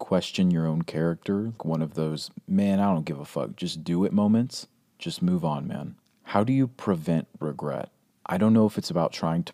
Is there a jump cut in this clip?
yes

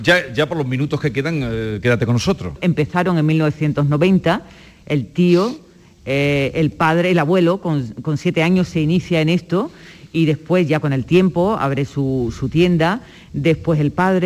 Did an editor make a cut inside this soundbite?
yes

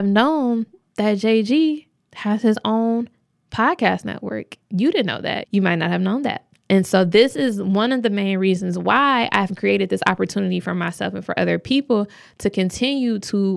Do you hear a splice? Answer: yes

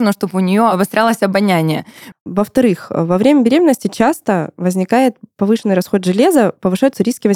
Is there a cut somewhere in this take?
yes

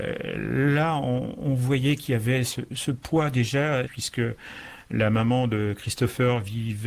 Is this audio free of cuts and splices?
no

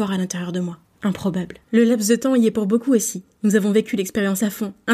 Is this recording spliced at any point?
yes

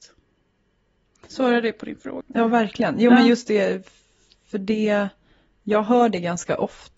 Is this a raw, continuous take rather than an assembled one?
no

